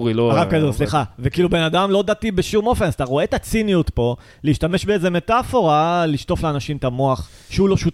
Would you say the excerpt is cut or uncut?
uncut